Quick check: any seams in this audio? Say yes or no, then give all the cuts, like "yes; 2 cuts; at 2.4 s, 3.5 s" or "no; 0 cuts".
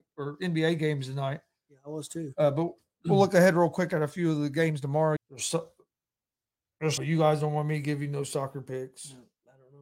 yes; 2 cuts; at 5.2 s, 7.0 s